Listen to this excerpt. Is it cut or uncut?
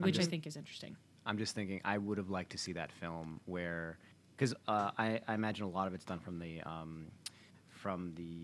uncut